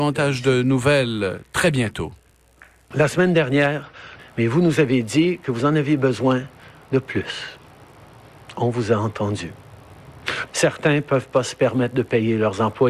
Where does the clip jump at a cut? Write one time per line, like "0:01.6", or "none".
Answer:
0:02.9
0:04.2
0:10.5

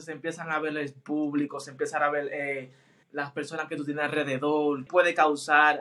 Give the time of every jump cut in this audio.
0:03.0
0:04.9

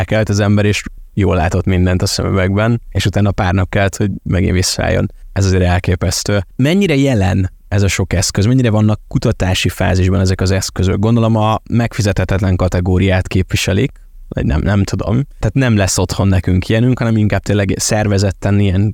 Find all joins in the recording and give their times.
none

